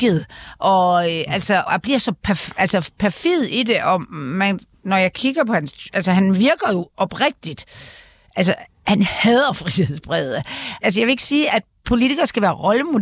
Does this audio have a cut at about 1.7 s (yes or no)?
yes